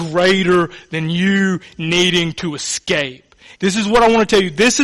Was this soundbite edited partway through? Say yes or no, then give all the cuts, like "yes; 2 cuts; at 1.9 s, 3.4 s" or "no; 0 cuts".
yes; 1 cut; at 3.6 s